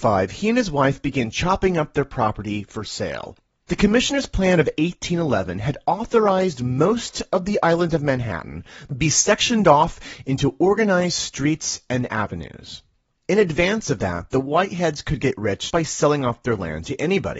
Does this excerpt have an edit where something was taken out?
yes; 1 cut; at 15.7 s

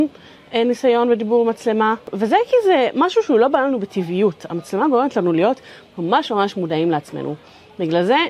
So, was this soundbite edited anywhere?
no; 0 cuts

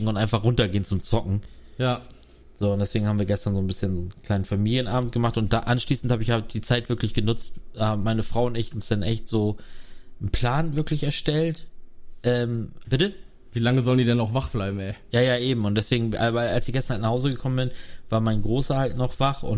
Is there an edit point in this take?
yes; 1 cut; at 12.8 s

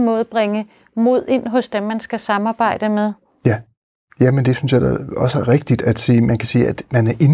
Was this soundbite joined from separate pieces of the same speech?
no; 0 cuts

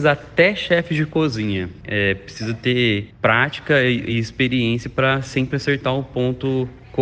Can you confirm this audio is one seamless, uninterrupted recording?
yes; 0 cuts

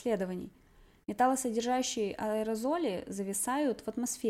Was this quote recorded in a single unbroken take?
yes; 0 cuts

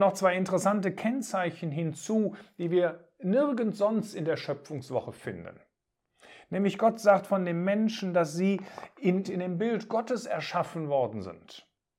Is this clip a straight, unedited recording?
no; 1 cut; at 9.2 s

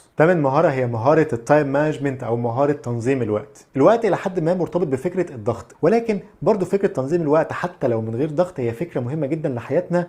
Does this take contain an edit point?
yes; 1 cut; at 5.7 s

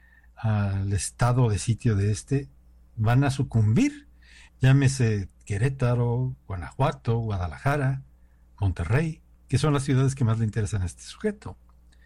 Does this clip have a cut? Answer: no; 0 cuts

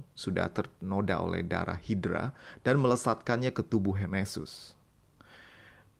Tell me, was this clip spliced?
no; 0 cuts

